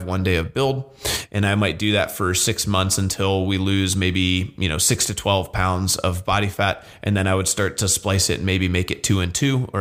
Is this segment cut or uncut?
uncut